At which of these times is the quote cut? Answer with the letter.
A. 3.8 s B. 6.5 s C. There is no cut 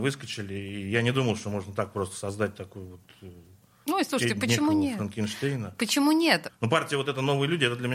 B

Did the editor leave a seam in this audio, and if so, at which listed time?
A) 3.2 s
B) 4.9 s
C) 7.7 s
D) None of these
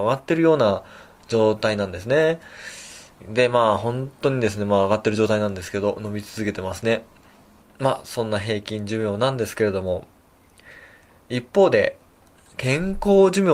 A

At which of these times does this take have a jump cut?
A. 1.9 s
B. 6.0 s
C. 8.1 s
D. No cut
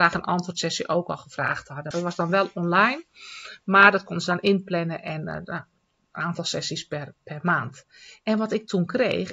A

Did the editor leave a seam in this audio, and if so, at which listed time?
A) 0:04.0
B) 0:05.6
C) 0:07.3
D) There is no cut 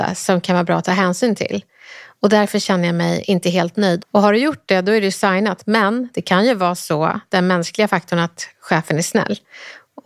A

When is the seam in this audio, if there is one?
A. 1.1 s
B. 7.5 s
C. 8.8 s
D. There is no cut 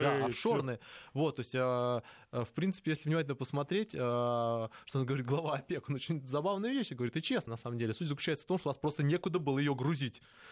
D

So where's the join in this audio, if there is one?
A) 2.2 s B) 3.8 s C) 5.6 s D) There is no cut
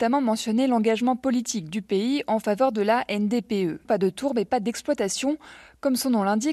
B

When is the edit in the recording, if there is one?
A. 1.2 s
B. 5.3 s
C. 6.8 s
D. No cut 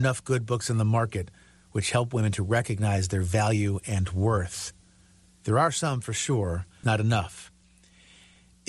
C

